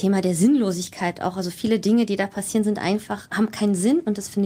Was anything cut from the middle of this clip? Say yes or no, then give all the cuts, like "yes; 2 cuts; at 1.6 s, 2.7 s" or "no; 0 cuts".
no; 0 cuts